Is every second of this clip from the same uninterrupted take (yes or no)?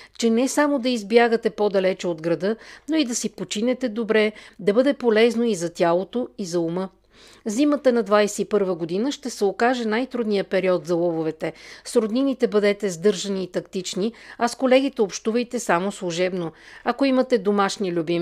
yes